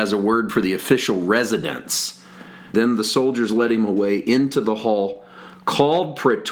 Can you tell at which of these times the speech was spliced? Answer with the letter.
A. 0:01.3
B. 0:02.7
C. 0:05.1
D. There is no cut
B